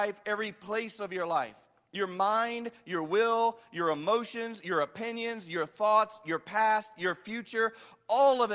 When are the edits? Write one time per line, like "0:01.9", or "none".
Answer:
none